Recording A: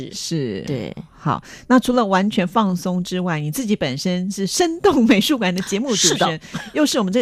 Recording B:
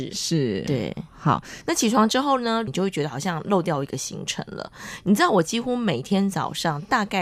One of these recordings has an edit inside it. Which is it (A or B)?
B